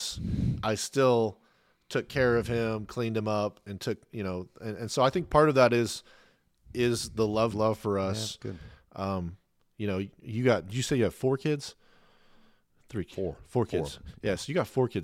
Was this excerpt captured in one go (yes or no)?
no